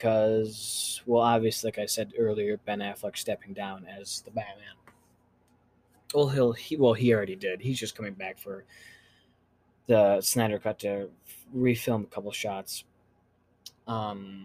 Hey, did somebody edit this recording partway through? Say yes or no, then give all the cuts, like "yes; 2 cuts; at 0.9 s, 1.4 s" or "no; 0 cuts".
no; 0 cuts